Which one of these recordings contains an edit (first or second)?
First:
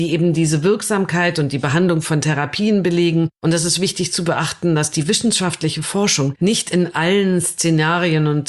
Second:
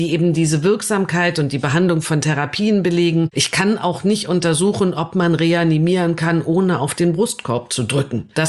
second